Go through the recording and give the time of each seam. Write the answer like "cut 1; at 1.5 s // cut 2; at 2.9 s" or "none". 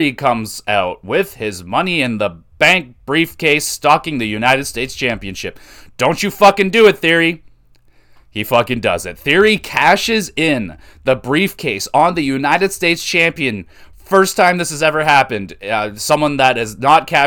none